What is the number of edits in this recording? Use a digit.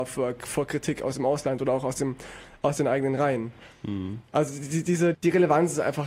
1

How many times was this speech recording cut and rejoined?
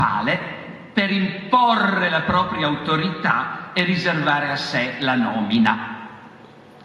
0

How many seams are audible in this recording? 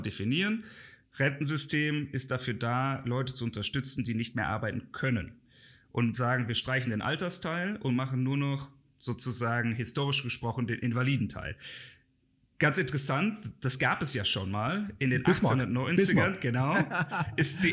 0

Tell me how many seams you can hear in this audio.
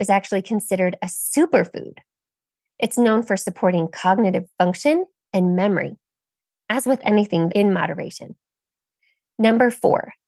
1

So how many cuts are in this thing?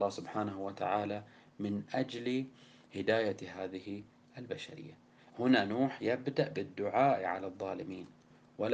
1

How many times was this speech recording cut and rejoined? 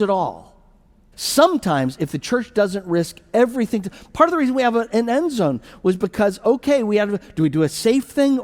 1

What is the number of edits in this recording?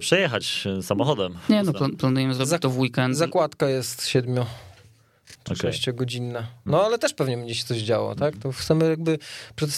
1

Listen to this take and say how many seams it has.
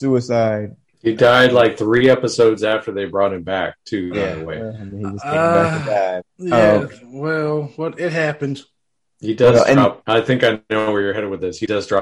1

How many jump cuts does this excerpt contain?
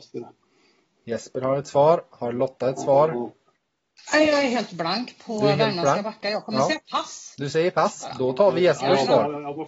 0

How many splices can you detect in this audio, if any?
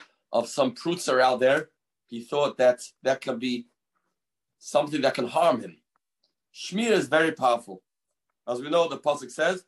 0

